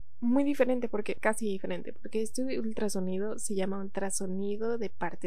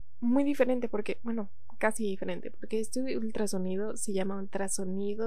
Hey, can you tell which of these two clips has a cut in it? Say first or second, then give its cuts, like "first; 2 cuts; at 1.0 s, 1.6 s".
first; 1 cut; at 1.2 s